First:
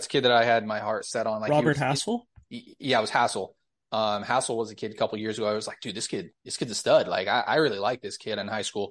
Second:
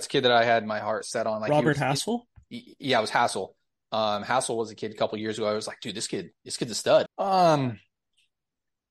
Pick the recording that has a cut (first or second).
second